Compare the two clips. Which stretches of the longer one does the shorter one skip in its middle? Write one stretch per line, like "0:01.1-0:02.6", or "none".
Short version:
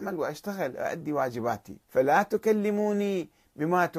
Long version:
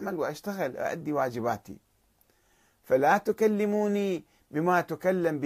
0:01.8-0:02.8